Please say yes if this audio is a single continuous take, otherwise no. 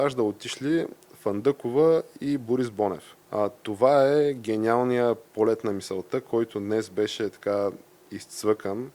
no